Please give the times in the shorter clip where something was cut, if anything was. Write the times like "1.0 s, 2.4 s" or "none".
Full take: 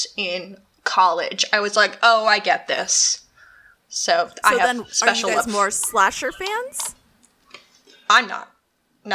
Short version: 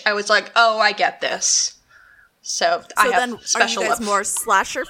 none